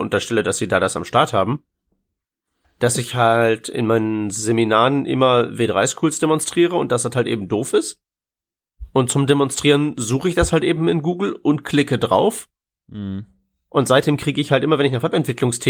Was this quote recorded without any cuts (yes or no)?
yes